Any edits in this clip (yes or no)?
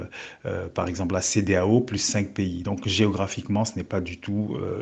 no